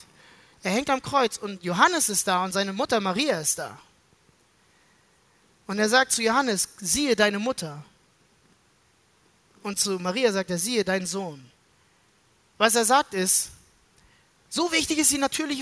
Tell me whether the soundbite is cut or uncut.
uncut